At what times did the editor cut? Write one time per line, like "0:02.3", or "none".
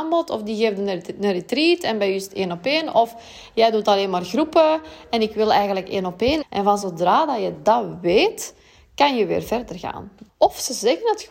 0:06.4
0:10.3